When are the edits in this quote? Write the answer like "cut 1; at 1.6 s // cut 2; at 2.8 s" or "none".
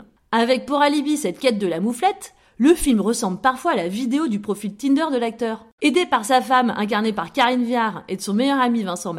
cut 1; at 5.8 s